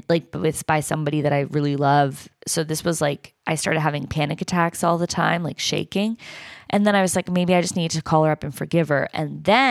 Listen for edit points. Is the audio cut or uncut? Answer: uncut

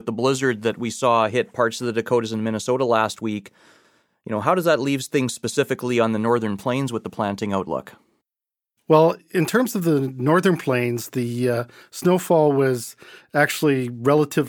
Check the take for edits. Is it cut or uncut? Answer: uncut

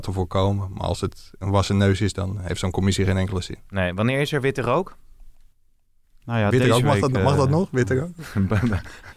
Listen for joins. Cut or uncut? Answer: uncut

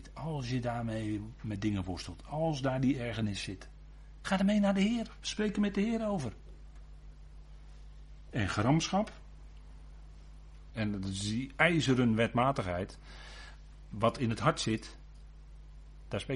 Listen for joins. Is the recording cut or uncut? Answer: cut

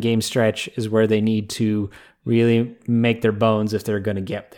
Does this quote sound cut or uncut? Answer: uncut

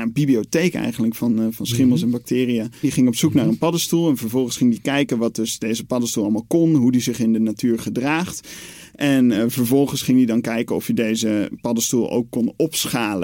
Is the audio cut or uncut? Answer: cut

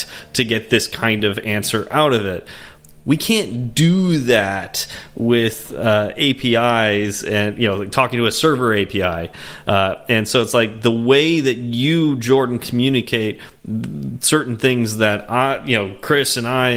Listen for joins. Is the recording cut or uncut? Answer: uncut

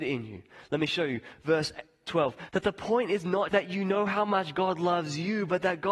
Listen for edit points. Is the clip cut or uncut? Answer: cut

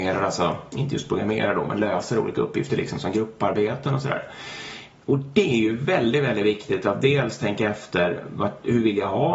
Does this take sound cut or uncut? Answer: uncut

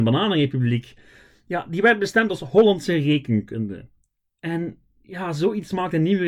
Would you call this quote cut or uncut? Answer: uncut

